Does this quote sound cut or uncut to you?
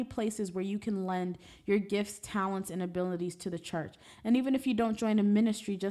uncut